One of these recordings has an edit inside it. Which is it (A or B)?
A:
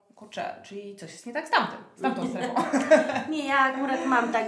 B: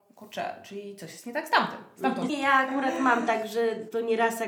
B